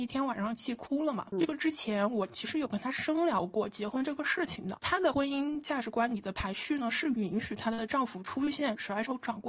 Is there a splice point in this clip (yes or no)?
no